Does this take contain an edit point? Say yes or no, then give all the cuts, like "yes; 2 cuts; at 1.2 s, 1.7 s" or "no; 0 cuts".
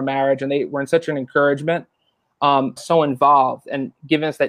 yes; 1 cut; at 2.8 s